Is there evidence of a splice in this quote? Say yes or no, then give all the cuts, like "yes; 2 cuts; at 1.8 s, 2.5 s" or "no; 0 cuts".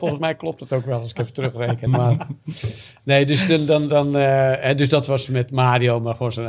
no; 0 cuts